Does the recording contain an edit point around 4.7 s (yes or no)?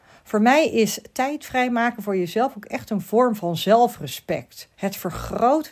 yes